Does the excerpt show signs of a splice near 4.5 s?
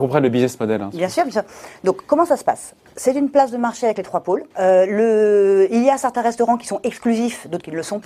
yes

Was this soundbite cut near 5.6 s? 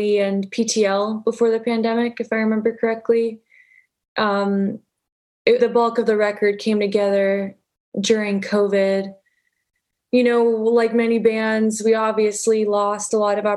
yes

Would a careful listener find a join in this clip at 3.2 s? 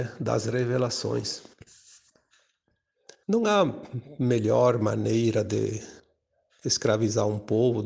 yes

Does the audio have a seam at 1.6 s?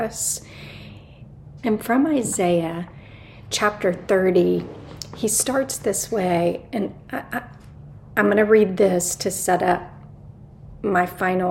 yes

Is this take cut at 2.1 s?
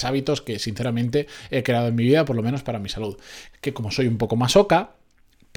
no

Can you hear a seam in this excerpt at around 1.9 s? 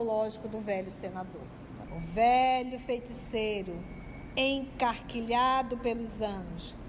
yes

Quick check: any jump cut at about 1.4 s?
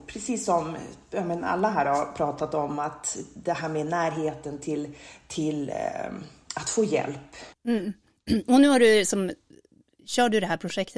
no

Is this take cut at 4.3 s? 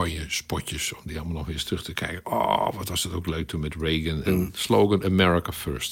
yes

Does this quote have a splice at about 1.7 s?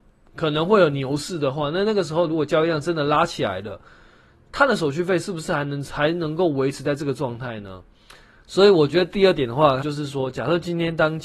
no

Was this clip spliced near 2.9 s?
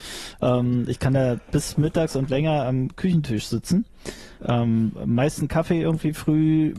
no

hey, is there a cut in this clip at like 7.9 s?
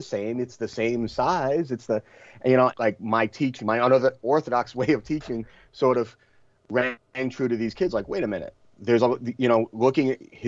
no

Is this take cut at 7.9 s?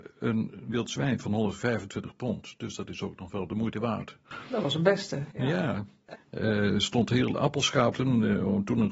yes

